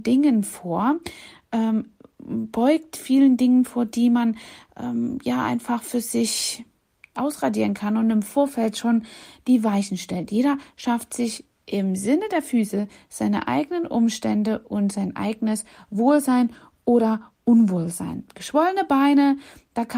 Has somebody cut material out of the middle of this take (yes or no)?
no